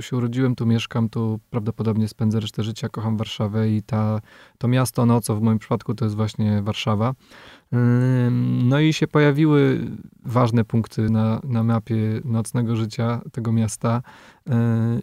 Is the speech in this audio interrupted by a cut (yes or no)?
no